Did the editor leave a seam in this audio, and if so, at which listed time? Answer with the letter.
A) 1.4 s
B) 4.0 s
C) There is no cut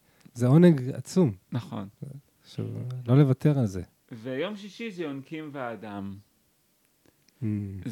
C